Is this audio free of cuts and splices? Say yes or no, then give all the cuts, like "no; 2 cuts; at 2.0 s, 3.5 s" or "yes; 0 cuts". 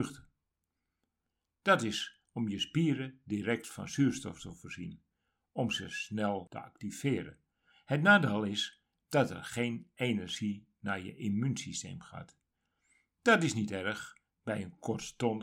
yes; 0 cuts